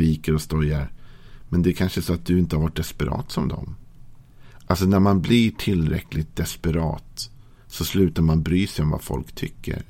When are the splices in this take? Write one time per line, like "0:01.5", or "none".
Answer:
none